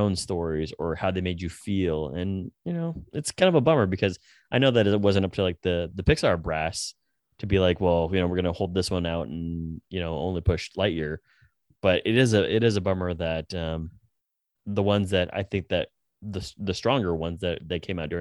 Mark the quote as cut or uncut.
cut